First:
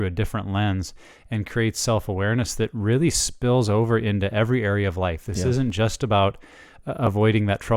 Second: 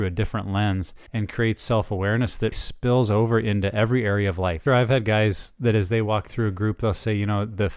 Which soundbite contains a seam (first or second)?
second